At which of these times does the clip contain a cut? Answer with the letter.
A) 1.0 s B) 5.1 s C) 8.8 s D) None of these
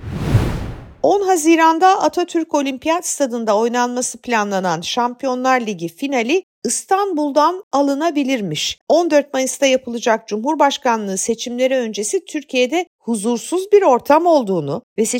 C